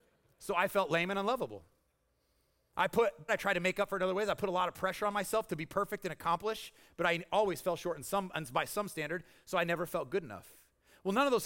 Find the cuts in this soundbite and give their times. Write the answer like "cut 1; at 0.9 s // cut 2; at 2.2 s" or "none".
cut 1; at 3.3 s